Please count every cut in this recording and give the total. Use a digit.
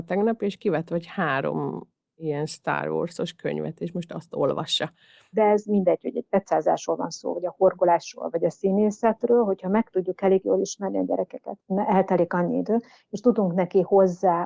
2